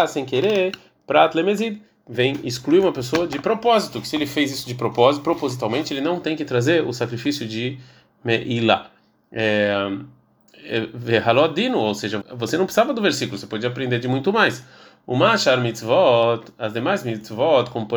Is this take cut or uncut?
cut